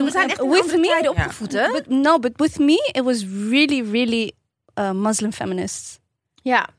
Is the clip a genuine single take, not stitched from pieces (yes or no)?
yes